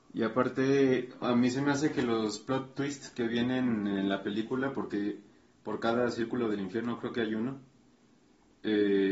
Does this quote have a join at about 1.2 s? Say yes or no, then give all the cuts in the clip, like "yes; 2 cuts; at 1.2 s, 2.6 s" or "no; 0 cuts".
yes; 1 cut; at 1.2 s